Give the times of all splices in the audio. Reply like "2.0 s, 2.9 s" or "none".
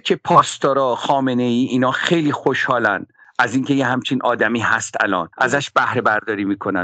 5.3 s